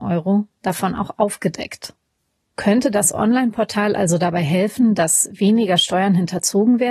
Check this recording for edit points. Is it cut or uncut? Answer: uncut